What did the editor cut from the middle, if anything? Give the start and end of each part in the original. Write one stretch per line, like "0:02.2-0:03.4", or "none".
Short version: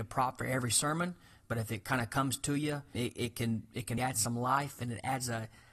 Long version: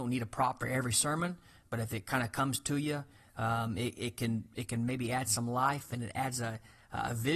0:03.2-0:03.8
0:04.8-0:05.1

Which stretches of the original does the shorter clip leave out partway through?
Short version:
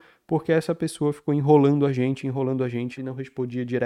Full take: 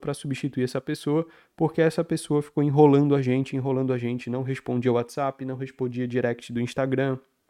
0:04.2-0:05.4

